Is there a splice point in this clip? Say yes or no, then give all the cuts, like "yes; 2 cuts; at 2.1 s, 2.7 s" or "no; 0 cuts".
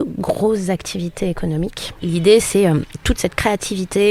yes; 1 cut; at 2.0 s